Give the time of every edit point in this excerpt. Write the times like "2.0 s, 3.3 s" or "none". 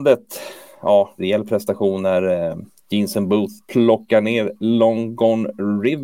1.2 s